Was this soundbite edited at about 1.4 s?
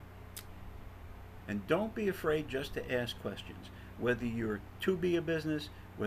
yes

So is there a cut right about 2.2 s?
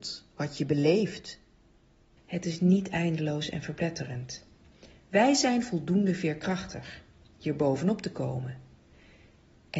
yes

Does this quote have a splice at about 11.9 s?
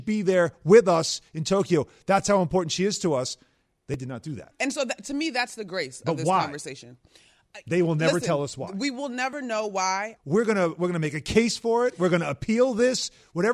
no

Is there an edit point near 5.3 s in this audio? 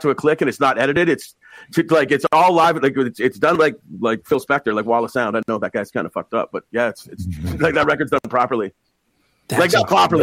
no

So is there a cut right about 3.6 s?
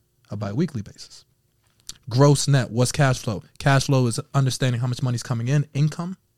no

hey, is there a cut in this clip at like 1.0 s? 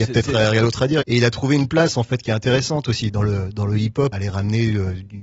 yes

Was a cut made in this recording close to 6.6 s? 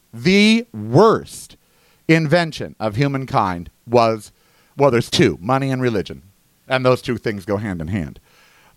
no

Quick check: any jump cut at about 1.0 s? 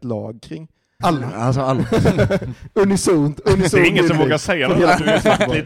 yes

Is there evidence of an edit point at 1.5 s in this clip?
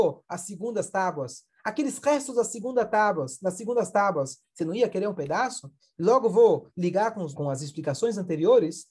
no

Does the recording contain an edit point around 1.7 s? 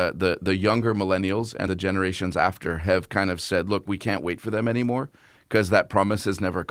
yes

